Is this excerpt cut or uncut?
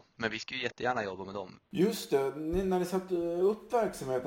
cut